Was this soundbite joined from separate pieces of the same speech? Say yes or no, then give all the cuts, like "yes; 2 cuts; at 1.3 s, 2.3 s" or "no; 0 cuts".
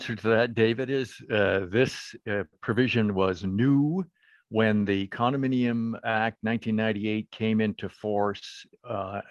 no; 0 cuts